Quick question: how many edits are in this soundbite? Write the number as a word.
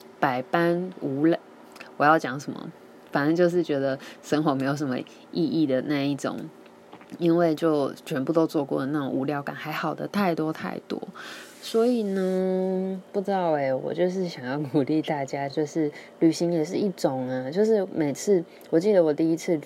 zero